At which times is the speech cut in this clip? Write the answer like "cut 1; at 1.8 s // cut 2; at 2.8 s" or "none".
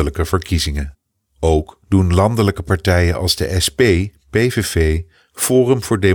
none